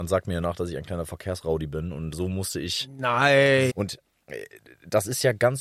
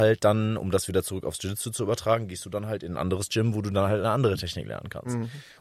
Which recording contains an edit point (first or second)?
first